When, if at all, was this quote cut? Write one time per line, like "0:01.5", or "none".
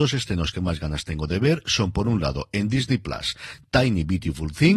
none